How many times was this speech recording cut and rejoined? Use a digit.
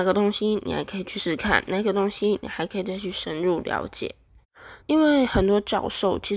2